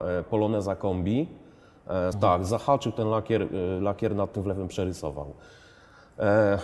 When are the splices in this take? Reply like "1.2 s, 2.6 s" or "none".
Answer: 2.1 s

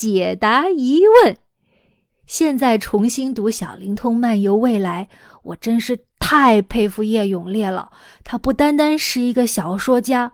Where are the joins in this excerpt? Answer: 2.1 s

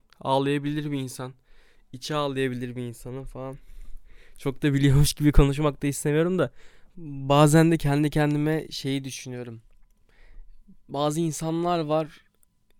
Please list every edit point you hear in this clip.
6.9 s

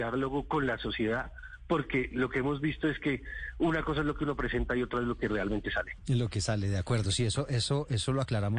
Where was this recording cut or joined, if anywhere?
none

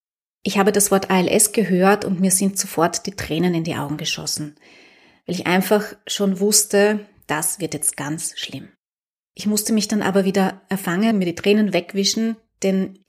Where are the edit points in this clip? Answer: 11.1 s

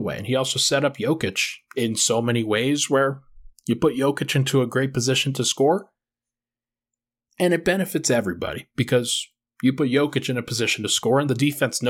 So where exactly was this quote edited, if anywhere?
none

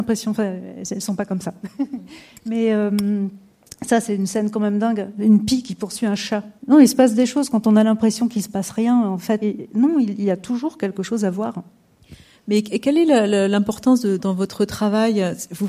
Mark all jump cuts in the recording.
6.6 s, 9.4 s, 14.2 s

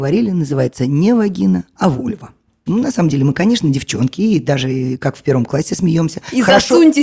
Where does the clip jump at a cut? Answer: 2.7 s

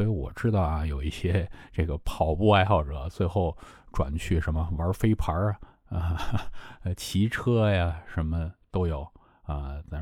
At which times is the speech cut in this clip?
none

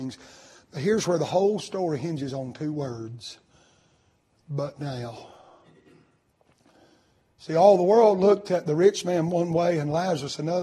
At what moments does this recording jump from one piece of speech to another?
none

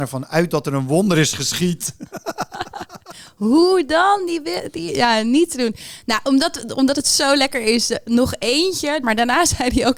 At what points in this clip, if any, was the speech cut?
9.0 s

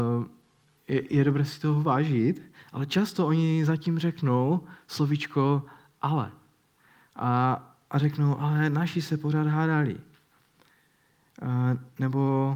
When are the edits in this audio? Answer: none

